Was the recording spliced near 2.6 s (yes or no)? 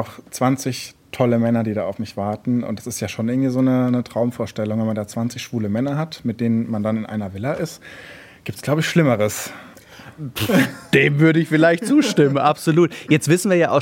no